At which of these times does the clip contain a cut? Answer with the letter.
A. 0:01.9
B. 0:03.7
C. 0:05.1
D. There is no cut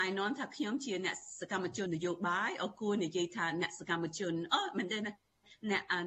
A